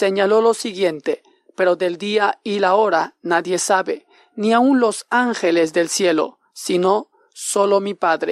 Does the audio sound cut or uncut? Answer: uncut